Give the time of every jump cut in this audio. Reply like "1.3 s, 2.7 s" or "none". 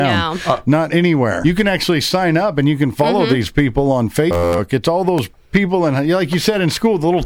1.4 s